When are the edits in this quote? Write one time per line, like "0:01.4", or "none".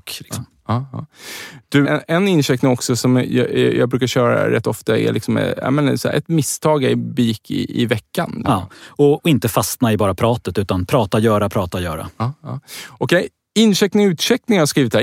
0:01.8
0:08.4